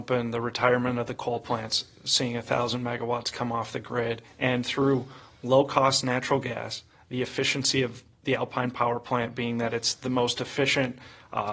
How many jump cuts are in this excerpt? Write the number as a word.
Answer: one